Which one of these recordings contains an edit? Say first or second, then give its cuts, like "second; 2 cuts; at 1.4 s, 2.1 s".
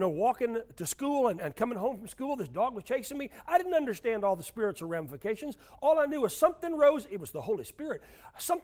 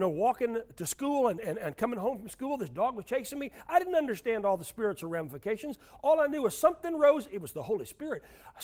first; 1 cut; at 1.4 s